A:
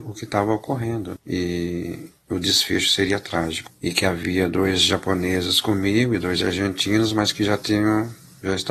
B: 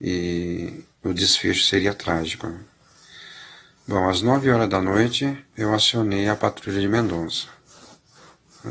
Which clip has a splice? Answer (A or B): A